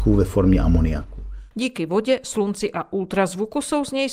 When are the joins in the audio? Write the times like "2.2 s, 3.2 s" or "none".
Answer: 1.5 s